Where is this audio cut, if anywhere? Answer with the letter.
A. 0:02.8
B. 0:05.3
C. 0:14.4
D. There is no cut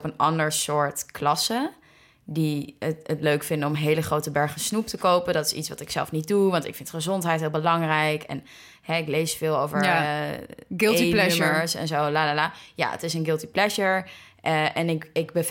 A